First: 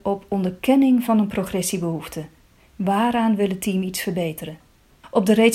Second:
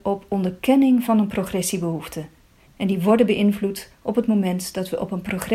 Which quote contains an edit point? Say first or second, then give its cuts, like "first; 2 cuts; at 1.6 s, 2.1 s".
second; 1 cut; at 2.7 s